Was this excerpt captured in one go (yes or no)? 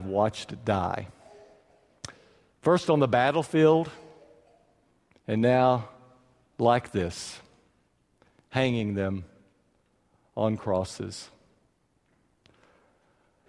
yes